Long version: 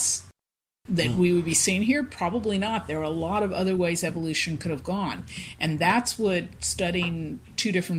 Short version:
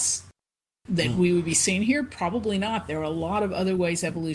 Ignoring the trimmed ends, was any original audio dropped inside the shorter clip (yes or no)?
no